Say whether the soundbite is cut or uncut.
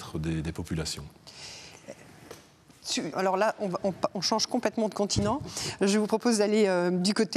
cut